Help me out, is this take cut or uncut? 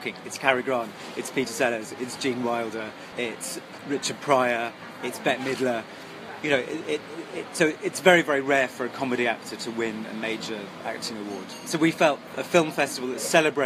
uncut